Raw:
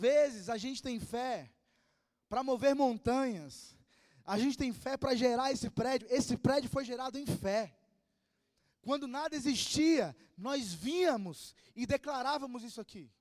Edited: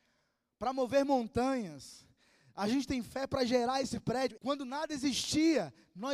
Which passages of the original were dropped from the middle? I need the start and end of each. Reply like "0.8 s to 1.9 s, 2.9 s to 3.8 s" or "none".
6.1 s to 8.8 s